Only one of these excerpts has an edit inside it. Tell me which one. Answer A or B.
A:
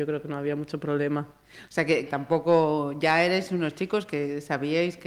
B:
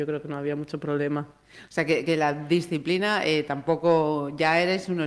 A